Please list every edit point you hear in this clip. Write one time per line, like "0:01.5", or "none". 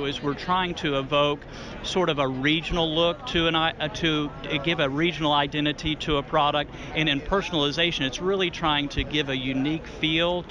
0:06.9